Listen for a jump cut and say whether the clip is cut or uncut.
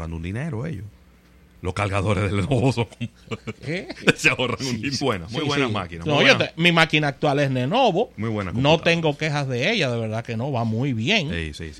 cut